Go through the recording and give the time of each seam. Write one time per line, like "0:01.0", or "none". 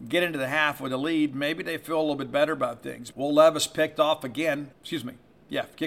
0:03.1
0:04.7